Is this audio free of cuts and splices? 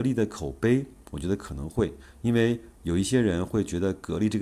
yes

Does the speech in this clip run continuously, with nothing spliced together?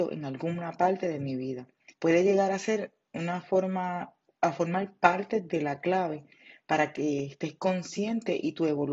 no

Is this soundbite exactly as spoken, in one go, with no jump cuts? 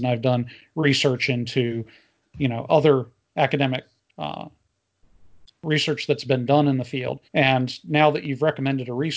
no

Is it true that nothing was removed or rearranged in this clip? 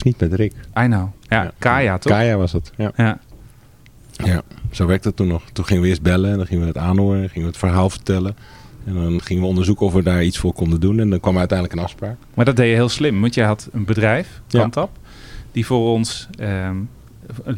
yes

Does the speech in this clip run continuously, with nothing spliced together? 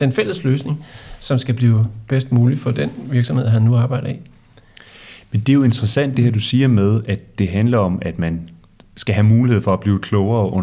yes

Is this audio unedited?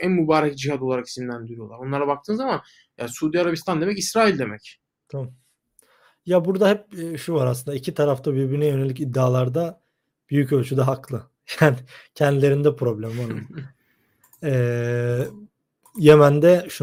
yes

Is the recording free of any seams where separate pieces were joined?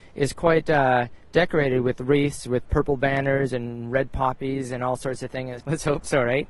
no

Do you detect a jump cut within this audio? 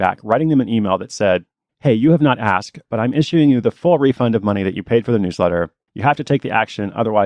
yes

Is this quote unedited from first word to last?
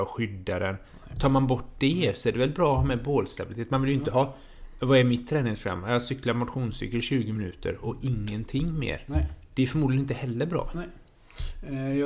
yes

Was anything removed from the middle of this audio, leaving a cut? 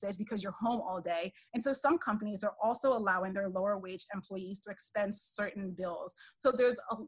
no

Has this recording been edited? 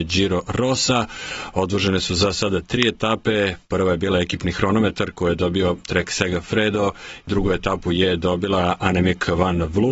yes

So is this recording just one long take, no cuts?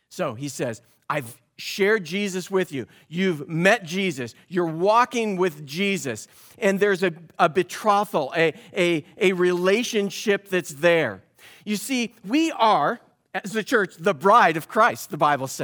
yes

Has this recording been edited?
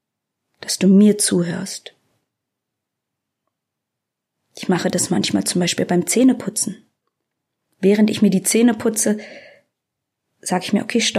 no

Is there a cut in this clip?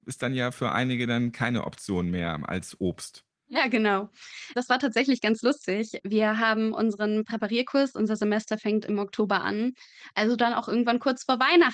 no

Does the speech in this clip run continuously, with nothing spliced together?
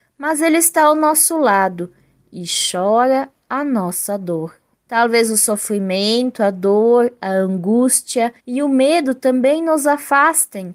no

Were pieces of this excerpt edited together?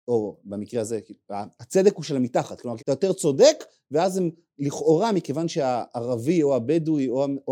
yes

